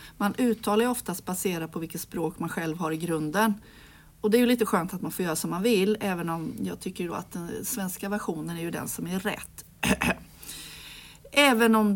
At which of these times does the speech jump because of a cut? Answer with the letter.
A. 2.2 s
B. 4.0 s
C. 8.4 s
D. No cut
D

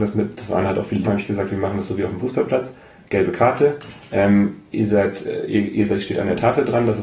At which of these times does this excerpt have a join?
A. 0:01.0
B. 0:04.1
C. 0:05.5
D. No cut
A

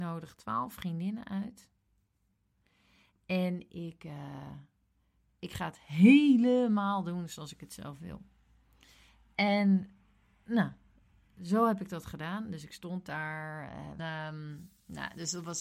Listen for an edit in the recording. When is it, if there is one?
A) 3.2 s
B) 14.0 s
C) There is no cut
B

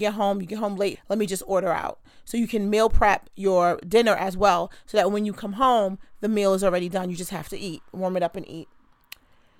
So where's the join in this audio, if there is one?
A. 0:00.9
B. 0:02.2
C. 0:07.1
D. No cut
A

